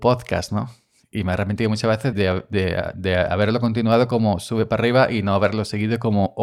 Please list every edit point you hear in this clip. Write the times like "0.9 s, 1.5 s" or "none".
2.1 s